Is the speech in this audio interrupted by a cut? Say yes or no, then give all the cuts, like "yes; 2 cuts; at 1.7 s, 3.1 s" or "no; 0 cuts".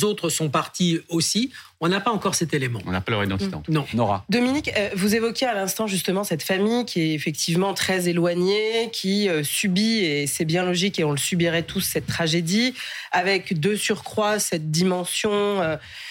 no; 0 cuts